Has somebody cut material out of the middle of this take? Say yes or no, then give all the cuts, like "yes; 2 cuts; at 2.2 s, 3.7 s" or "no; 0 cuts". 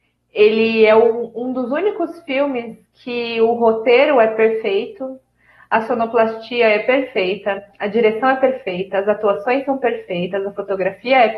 no; 0 cuts